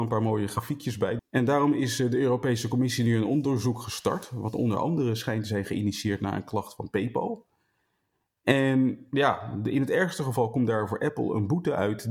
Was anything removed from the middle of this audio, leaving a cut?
yes; 1 cut; at 1.2 s

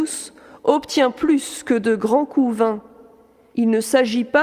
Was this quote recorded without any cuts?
yes; 0 cuts

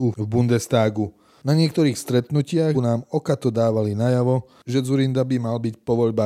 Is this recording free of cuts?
no; 1 cut; at 2.7 s

